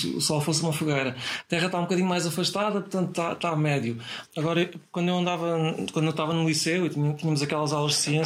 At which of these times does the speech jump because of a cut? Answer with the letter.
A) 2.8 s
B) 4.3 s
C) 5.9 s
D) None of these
B